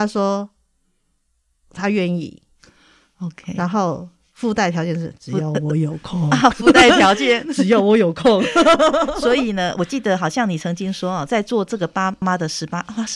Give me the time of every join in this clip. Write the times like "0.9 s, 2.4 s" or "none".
12.2 s